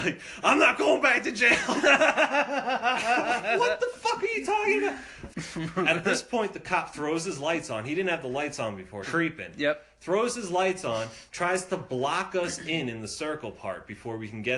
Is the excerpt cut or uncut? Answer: cut